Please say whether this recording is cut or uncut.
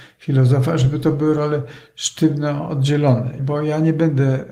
cut